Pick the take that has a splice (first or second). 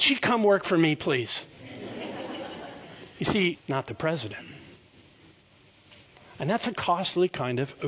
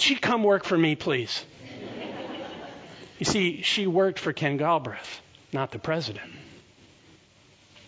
first